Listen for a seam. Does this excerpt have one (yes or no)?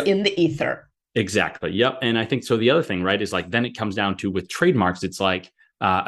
no